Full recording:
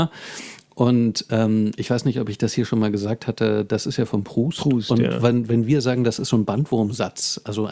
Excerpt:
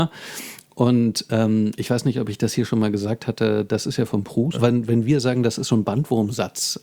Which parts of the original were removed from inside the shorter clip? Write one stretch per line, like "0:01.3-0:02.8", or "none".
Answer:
0:04.5-0:05.1